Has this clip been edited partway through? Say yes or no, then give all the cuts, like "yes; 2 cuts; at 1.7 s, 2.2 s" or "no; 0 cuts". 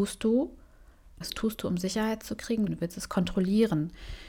yes; 2 cuts; at 1.2 s, 2.7 s